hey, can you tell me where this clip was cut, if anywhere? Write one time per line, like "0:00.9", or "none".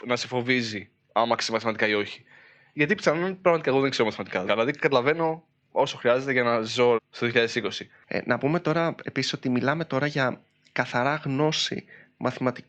0:04.5
0:07.0